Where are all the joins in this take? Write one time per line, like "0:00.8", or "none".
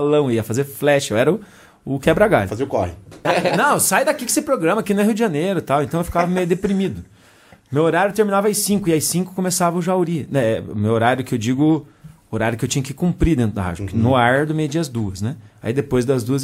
0:03.2

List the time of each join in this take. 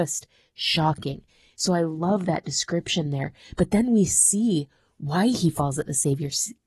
none

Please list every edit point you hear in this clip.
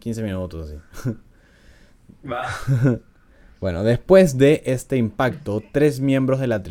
none

